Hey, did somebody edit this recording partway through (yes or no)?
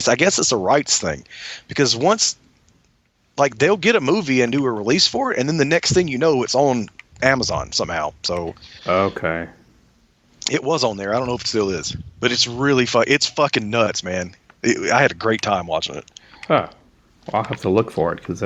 no